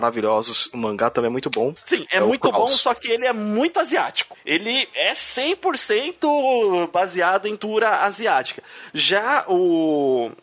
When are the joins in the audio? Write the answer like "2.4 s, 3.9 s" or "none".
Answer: none